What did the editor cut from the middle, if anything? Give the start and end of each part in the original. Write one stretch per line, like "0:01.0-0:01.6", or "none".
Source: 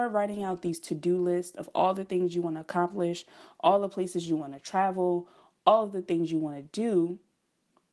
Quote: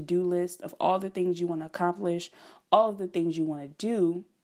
0:03.6-0:05.6